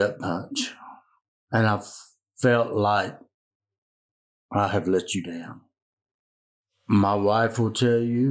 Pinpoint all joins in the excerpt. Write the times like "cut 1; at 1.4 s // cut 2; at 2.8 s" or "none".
none